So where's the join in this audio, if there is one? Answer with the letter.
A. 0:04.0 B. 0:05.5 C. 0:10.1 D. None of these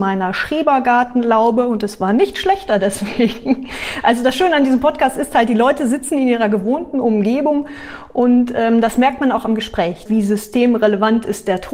C